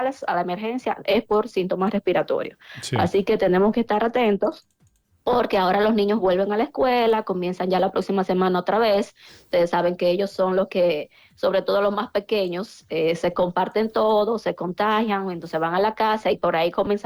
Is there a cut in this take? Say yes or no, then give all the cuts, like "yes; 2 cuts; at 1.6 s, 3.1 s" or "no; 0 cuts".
no; 0 cuts